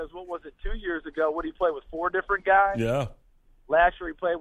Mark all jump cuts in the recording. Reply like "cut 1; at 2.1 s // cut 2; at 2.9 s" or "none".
none